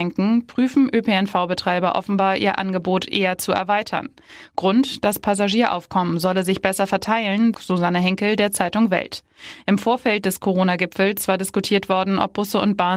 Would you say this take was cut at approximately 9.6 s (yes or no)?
no